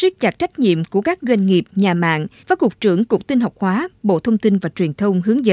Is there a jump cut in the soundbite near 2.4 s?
yes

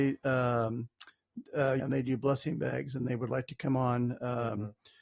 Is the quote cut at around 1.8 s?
yes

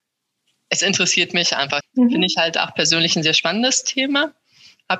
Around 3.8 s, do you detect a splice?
no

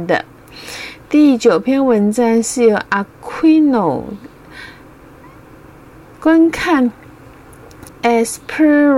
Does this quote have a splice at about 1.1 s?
no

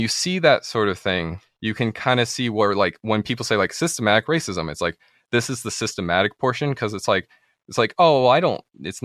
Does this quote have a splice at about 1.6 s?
no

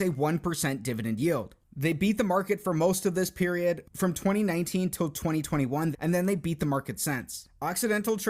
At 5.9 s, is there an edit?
yes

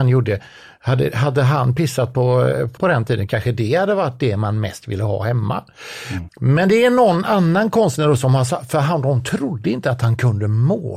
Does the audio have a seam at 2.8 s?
yes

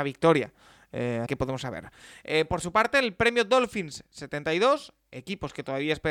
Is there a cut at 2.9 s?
no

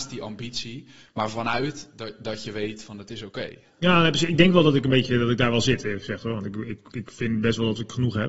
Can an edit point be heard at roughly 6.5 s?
no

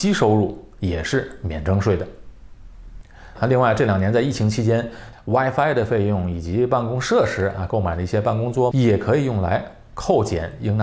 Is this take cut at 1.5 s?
no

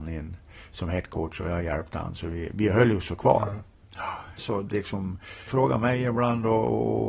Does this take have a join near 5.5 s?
yes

